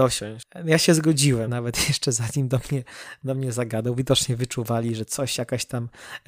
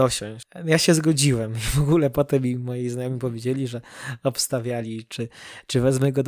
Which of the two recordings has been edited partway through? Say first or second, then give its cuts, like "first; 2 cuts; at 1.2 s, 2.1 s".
first; 1 cut; at 1.5 s